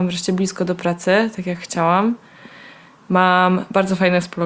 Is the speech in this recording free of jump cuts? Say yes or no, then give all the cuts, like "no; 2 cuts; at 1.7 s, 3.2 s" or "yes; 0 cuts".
yes; 0 cuts